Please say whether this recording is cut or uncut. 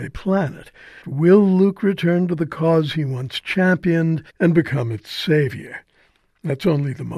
cut